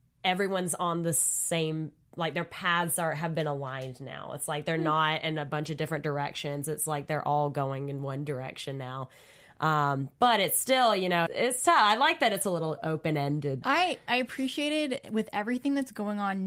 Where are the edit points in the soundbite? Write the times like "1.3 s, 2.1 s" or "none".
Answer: 11.3 s, 13.6 s

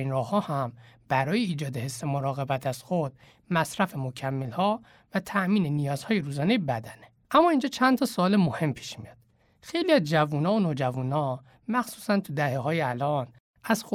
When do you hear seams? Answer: none

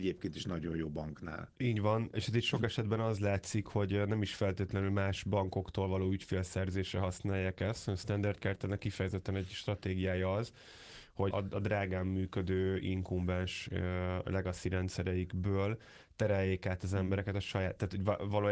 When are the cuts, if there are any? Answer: 2.1 s, 11.3 s

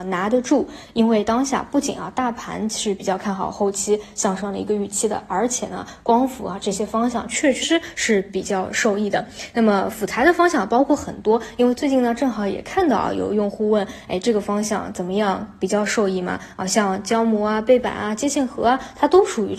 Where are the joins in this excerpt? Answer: 7.6 s

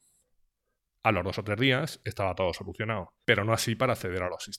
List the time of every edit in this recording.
3.2 s

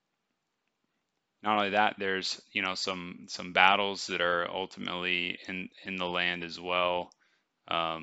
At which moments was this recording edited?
none

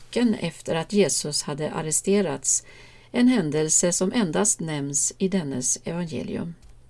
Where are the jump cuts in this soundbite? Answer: none

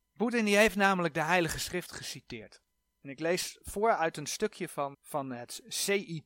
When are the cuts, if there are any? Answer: 4.9 s

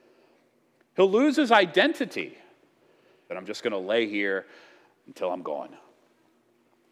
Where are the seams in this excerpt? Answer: 3.3 s

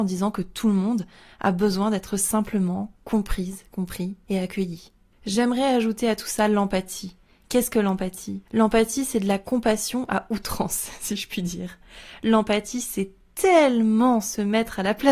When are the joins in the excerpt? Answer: 8.5 s

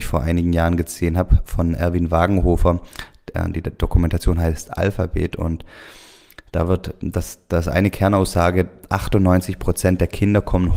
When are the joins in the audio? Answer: none

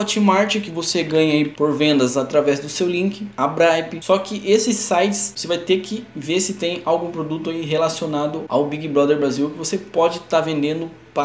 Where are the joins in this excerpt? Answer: 3.3 s

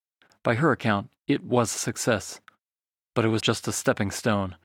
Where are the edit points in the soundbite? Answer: 3.4 s

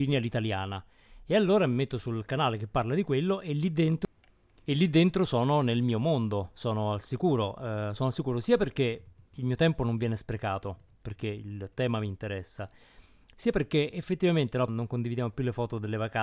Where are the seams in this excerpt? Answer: 14.7 s

